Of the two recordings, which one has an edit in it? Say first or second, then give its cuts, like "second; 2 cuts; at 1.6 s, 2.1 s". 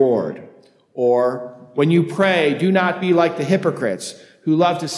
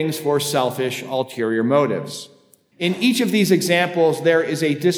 second; 1 cut; at 2.7 s